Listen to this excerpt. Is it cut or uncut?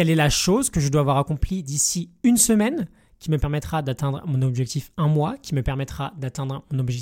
uncut